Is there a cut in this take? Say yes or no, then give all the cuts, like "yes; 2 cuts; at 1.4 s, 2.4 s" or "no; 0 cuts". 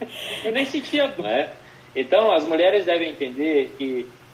yes; 1 cut; at 1.2 s